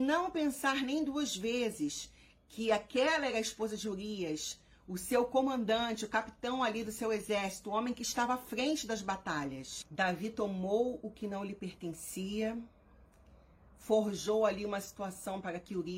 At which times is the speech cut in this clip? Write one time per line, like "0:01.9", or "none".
none